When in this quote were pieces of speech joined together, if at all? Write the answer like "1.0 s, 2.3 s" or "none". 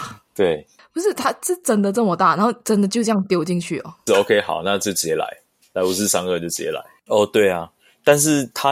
4.1 s, 7.1 s